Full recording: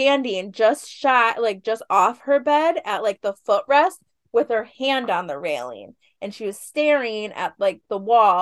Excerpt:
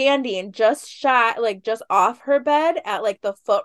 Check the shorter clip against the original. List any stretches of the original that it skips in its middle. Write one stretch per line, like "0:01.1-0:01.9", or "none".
none